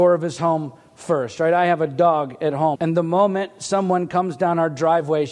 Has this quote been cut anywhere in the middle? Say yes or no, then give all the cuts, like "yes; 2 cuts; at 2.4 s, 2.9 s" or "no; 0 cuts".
yes; 1 cut; at 2.7 s